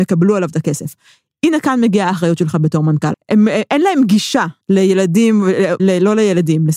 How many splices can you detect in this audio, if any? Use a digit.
3